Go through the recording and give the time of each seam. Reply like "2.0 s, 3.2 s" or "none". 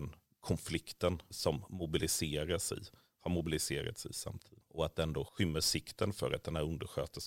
1.3 s